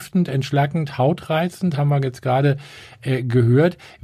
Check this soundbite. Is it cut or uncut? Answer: cut